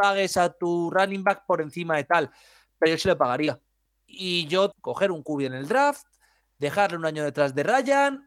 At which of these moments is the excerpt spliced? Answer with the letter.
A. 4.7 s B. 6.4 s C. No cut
A